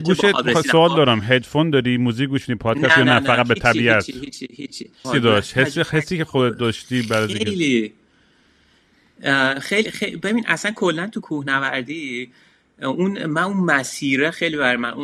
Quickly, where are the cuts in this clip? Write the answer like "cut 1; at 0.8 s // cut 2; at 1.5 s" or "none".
cut 1; at 5.0 s